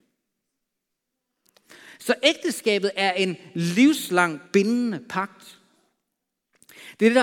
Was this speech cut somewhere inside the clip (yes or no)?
no